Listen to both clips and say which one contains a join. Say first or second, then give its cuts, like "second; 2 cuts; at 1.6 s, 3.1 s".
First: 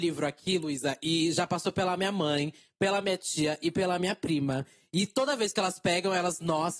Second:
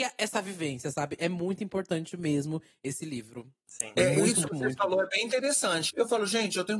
second; 2 cuts; at 4.5 s, 5.9 s